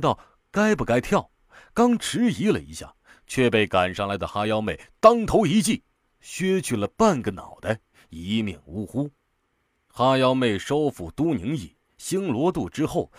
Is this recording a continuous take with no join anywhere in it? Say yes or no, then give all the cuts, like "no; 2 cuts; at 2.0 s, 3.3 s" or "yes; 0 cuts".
yes; 0 cuts